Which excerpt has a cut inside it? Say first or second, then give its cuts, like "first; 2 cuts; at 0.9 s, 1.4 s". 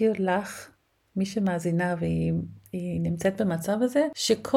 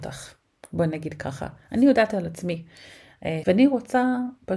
second; 1 cut; at 3.4 s